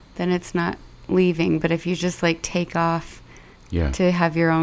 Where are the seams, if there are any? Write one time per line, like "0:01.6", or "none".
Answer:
none